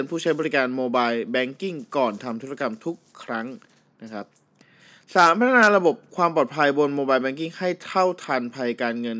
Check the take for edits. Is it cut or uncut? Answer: uncut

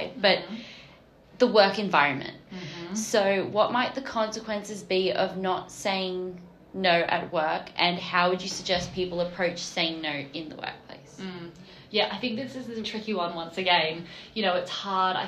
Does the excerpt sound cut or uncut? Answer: cut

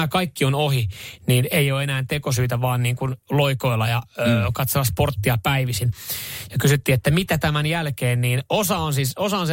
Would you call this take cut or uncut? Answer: uncut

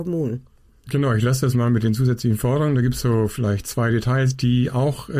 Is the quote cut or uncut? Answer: uncut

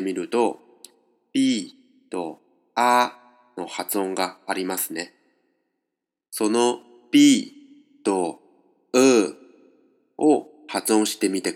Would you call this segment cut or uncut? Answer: uncut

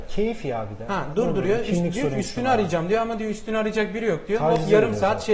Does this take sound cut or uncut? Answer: uncut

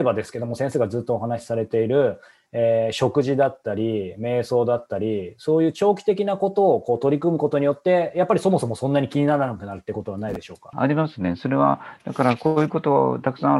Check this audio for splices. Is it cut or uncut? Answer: cut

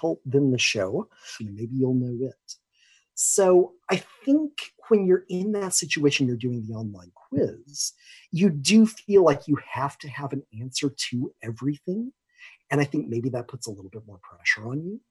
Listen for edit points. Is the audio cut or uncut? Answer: cut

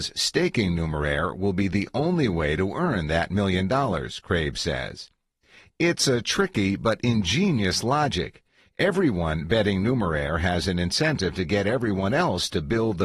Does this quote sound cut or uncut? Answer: uncut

